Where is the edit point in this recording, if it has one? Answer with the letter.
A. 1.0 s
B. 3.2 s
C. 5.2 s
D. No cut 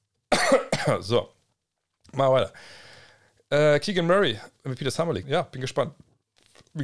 C